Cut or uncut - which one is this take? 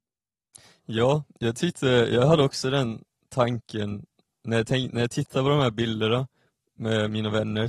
uncut